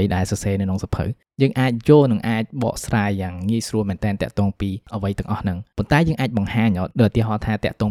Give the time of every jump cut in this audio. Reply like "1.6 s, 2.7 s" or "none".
none